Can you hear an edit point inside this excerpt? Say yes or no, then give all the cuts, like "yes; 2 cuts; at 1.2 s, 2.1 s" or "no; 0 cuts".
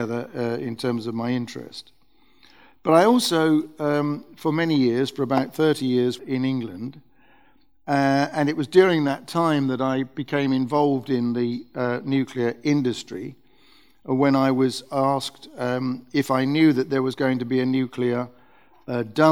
yes; 1 cut; at 6.2 s